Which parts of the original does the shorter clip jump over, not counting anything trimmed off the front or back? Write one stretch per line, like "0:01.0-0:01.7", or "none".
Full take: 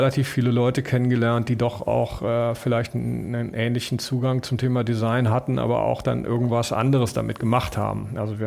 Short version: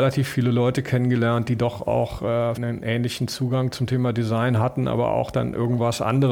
0:02.6-0:03.3